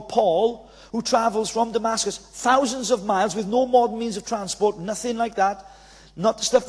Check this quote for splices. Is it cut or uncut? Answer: uncut